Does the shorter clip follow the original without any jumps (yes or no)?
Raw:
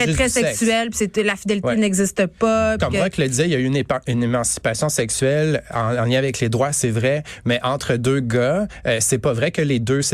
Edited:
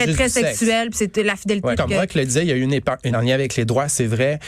no